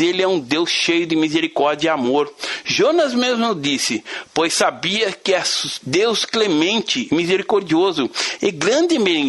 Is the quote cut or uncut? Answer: cut